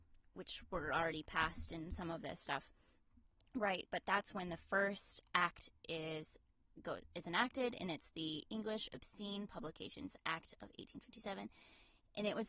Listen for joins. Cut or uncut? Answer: uncut